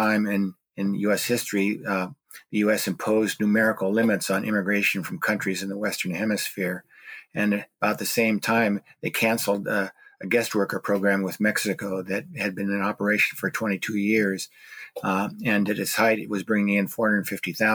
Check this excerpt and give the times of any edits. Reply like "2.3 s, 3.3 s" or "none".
none